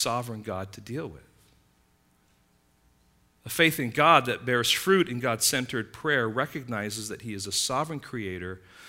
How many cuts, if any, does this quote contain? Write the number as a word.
zero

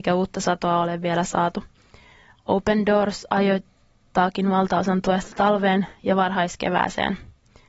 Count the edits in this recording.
zero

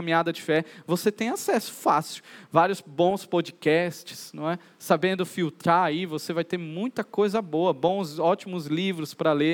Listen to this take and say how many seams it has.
zero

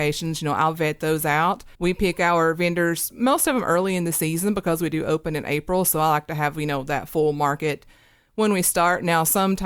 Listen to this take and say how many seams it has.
one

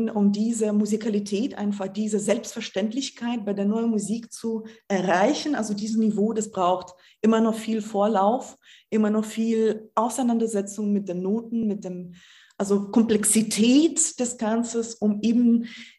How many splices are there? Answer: zero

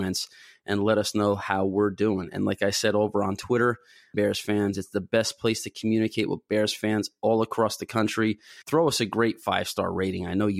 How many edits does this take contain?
two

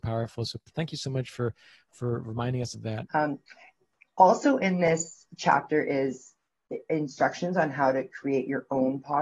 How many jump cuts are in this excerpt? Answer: one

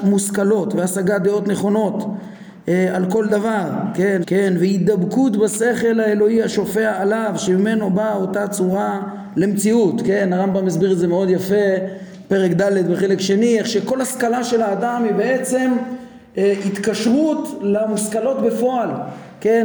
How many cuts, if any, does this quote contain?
one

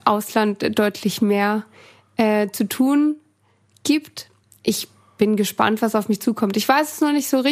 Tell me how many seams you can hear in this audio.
zero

